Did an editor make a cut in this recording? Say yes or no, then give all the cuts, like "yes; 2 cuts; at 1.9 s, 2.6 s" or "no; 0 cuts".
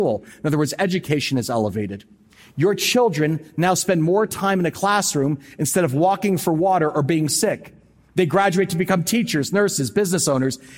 no; 0 cuts